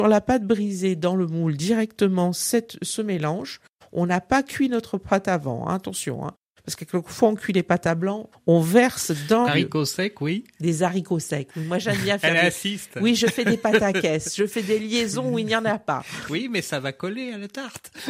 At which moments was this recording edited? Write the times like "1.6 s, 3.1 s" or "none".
8.3 s, 9.5 s